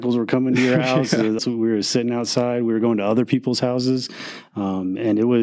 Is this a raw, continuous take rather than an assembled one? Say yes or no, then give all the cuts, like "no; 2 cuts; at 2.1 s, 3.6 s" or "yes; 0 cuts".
no; 1 cut; at 1.4 s